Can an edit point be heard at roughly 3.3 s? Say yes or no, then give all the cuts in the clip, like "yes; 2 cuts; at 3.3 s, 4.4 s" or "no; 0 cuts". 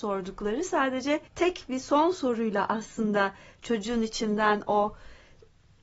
no; 1 cut; at 1.3 s